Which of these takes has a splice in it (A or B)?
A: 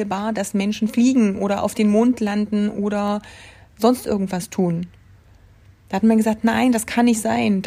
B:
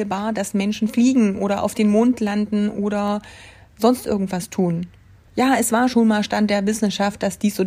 B